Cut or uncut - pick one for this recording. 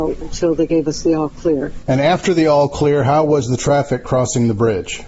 uncut